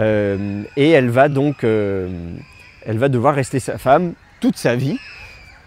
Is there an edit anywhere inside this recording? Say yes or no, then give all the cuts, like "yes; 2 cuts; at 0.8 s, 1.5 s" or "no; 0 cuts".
no; 0 cuts